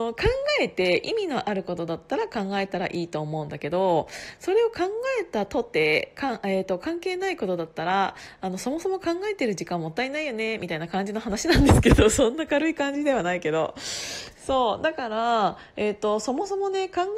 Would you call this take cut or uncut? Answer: uncut